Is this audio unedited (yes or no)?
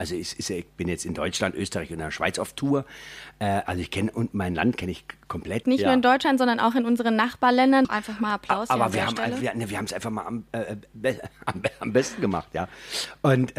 no